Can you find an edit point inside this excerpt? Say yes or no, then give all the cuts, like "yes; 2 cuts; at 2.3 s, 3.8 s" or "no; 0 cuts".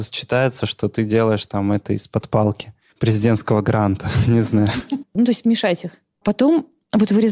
yes; 1 cut; at 5.0 s